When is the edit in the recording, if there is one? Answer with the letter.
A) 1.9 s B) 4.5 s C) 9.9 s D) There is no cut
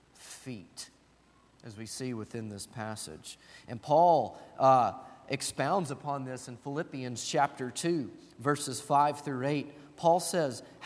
D